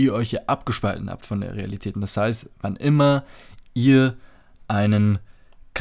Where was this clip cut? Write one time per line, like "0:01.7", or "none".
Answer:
0:01.9